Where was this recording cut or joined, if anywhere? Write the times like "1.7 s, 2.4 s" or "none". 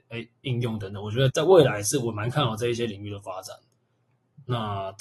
1.3 s

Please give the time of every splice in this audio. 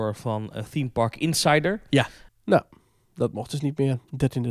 2.3 s

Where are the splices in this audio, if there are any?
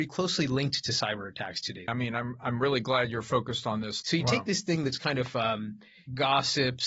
1.9 s, 4.0 s

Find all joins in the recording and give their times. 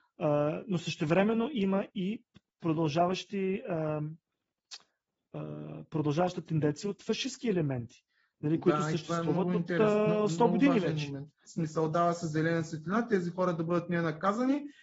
11.5 s

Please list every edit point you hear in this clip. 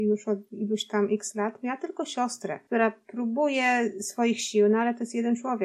none

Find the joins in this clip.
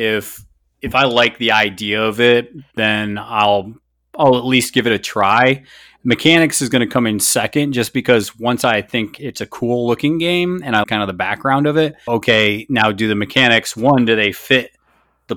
10.8 s, 12.1 s

